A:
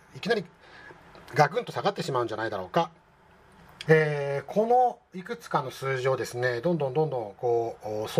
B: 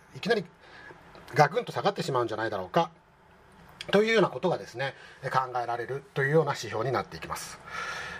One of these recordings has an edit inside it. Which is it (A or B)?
A